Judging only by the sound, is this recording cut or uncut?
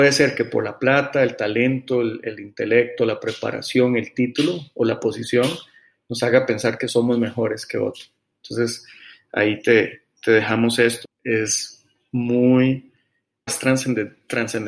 cut